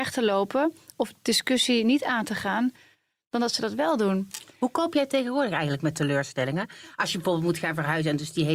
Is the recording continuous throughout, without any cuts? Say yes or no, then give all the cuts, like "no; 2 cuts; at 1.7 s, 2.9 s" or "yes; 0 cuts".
yes; 0 cuts